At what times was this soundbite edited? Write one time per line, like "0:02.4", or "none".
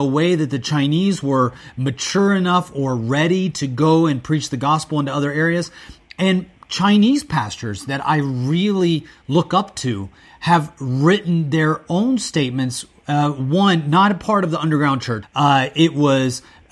0:15.2